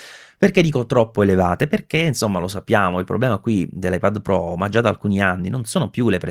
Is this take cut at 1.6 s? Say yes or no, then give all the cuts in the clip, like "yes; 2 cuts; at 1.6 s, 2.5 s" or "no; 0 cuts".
no; 0 cuts